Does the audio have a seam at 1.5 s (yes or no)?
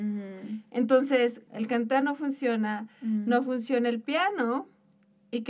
yes